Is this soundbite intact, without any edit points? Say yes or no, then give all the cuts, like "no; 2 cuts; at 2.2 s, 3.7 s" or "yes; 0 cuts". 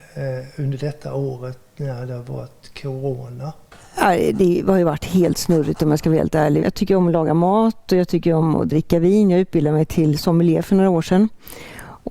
no; 1 cut; at 6.6 s